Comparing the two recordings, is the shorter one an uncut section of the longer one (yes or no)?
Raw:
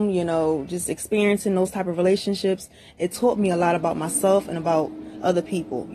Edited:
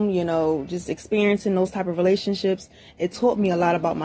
yes